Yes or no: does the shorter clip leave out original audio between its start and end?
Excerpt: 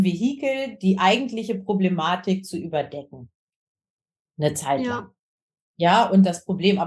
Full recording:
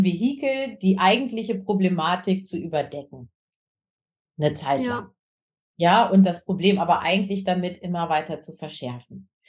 no